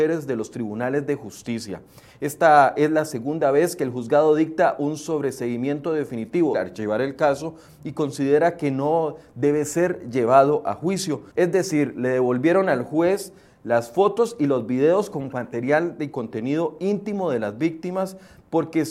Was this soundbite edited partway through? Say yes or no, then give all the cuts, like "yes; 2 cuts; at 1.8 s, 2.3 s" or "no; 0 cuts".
yes; 2 cuts; at 6.5 s, 11.3 s